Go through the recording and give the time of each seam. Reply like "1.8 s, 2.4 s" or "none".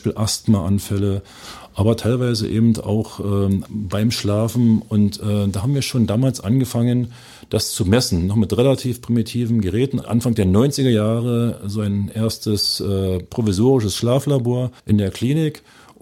3.7 s, 10.0 s, 14.8 s